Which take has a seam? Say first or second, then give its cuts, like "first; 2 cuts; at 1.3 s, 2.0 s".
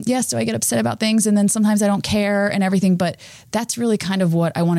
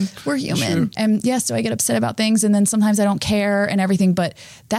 second; 1 cut; at 0.9 s